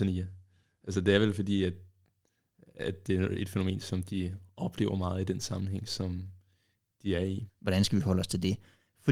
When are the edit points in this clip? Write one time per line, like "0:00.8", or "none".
0:07.5